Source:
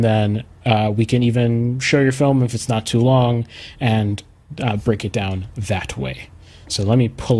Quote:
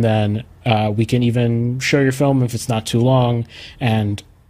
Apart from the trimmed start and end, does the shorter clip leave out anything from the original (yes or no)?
no